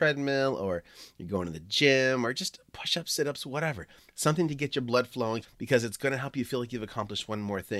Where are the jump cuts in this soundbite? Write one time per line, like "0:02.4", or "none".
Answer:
0:05.4